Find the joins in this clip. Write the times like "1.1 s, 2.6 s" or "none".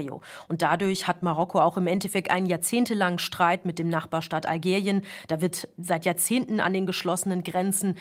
none